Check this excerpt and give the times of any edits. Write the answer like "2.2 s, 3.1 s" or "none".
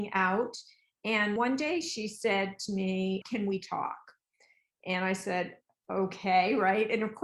1.4 s, 3.2 s